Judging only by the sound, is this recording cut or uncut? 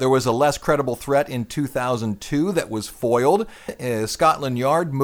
cut